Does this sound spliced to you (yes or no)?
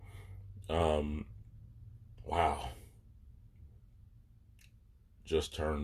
no